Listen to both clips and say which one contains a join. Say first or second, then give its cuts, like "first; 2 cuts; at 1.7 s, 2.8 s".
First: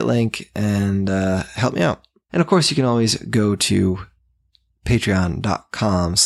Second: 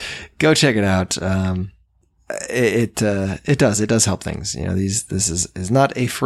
first; 1 cut; at 2.3 s